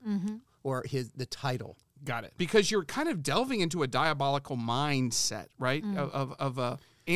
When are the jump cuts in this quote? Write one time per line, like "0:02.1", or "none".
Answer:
0:02.4

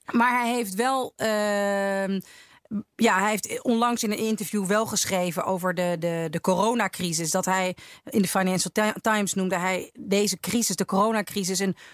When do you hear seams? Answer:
0:02.9

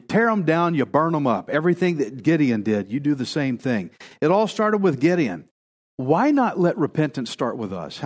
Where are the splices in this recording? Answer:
none

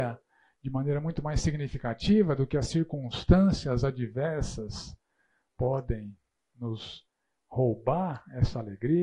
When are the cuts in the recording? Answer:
none

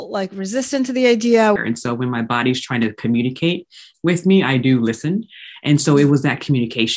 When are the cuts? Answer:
0:01.6

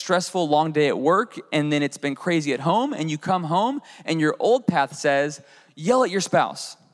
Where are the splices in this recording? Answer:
none

